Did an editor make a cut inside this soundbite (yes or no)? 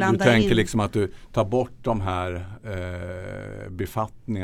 no